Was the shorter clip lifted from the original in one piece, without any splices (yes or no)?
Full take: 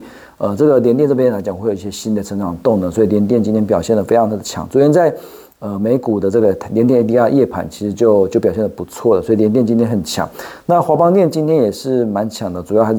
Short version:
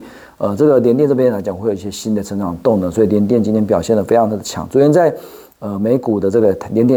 yes